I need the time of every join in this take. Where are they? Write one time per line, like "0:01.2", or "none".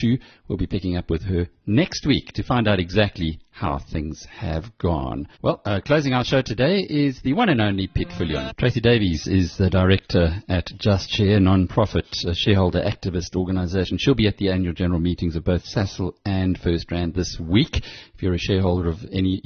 0:05.3
0:08.5